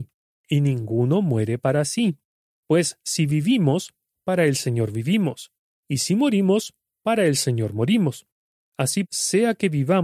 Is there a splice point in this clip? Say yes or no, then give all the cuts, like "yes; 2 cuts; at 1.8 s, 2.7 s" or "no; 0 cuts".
yes; 1 cut; at 9.1 s